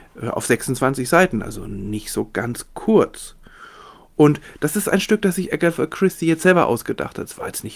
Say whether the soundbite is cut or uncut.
uncut